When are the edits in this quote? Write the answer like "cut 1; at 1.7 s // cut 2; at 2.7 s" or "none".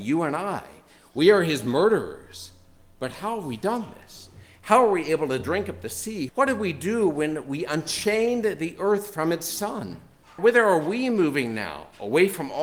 cut 1; at 6.3 s // cut 2; at 10.4 s